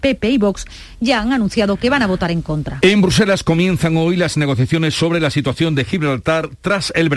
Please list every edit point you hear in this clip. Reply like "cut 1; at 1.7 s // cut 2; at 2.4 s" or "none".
none